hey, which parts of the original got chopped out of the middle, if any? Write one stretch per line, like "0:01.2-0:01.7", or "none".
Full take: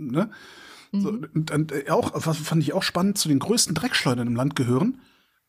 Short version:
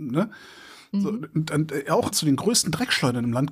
0:02.1-0:03.1